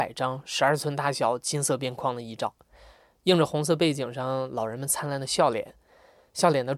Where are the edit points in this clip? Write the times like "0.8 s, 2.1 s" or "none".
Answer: none